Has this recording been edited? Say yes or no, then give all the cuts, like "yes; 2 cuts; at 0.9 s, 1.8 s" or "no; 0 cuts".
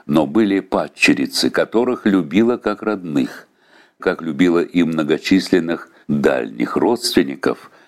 yes; 2 cuts; at 4.0 s, 6.0 s